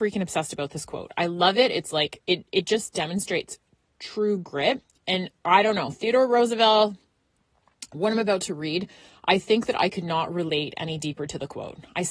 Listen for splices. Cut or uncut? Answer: uncut